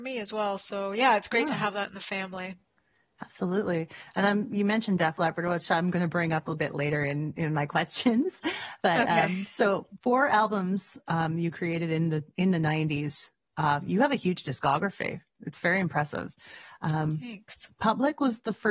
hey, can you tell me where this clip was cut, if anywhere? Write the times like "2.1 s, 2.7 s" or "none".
none